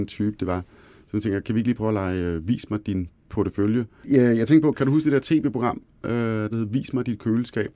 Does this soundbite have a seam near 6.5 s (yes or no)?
yes